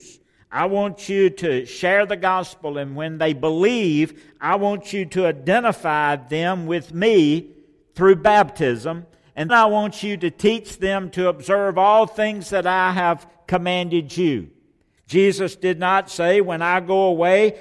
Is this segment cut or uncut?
cut